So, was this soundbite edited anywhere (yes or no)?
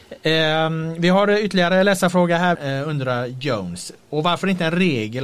yes